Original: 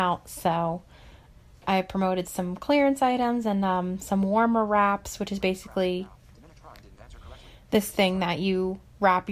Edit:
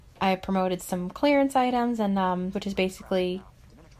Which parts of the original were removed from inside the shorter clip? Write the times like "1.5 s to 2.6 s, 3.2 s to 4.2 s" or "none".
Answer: 4.0 s to 5.2 s